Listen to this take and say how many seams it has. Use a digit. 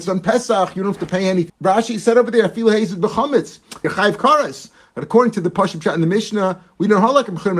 2